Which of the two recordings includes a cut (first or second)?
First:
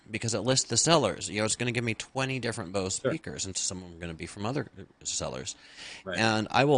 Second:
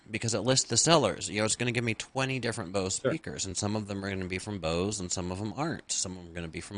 first